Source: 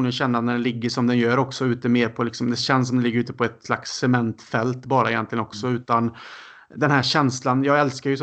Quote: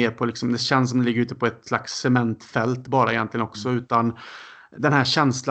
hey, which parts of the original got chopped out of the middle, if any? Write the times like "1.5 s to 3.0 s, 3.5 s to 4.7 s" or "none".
none